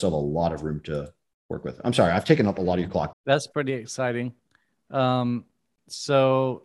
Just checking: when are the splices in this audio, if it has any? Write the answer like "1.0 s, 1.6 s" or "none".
3.1 s